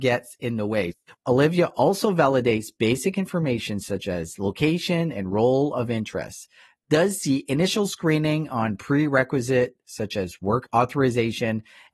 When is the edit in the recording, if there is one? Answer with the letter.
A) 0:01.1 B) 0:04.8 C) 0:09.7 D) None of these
A